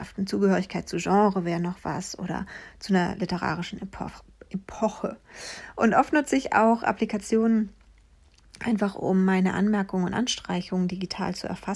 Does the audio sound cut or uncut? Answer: uncut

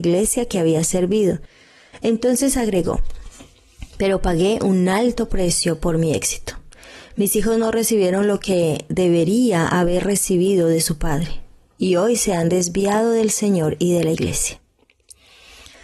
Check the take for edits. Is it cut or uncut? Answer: uncut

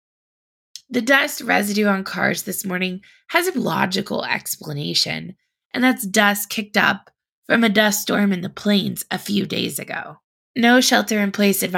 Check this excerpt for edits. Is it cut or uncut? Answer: cut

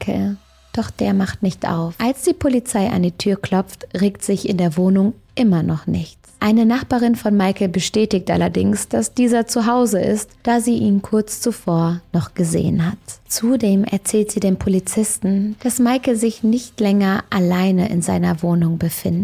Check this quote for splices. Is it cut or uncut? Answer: cut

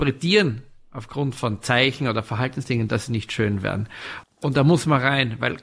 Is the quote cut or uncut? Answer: cut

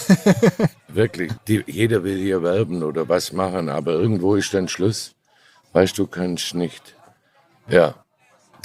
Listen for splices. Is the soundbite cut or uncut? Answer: cut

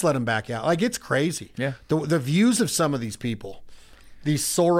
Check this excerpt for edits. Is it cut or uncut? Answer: uncut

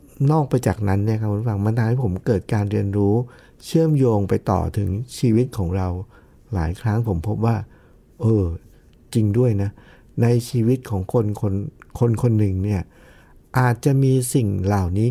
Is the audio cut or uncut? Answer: uncut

